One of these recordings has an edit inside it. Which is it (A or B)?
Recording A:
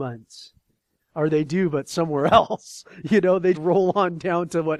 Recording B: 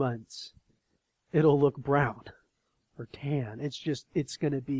A